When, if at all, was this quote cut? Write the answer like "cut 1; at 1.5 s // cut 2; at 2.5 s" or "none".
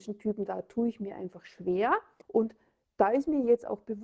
cut 1; at 2.2 s